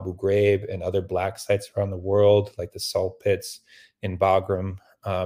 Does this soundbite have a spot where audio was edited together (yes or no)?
no